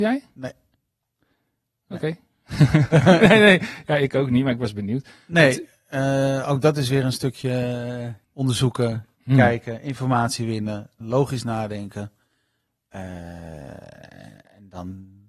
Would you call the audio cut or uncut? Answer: cut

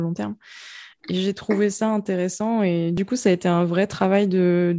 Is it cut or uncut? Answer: uncut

